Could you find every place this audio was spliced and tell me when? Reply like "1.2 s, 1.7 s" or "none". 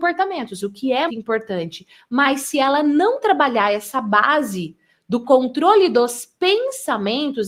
1.1 s